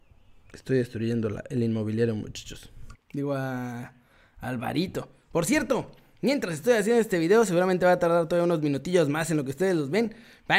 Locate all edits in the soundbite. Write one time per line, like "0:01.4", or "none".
0:02.9